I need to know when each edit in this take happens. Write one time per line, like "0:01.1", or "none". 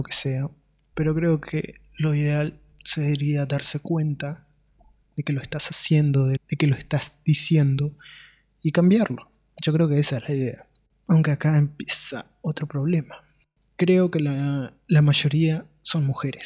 0:00.9
0:06.4